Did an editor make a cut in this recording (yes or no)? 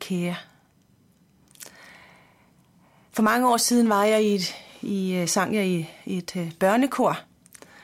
no